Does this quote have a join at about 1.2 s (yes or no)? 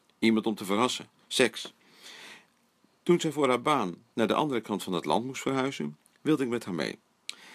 yes